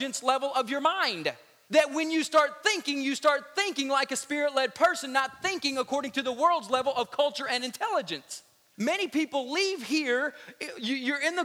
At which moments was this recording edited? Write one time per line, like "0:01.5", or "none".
none